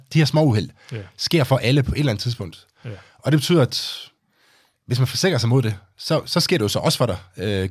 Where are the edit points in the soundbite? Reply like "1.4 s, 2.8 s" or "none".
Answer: none